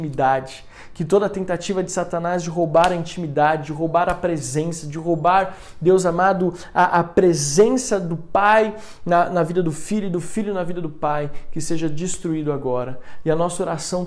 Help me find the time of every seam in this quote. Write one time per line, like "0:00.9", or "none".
none

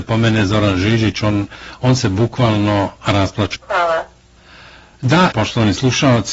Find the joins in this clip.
0:03.5
0:05.3

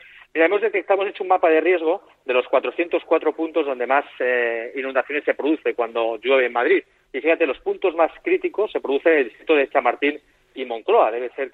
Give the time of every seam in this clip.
0:07.1
0:10.5

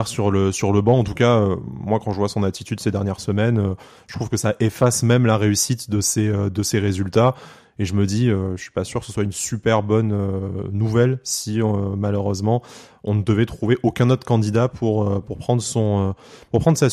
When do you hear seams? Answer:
none

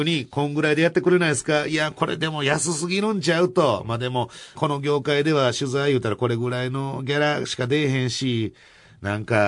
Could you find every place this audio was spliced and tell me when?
0:04.6

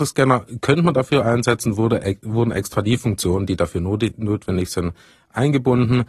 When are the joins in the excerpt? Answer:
none

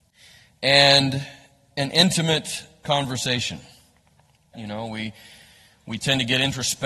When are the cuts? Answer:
0:04.5

